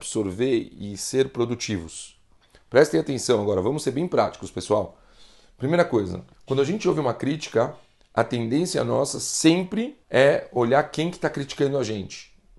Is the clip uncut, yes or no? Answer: no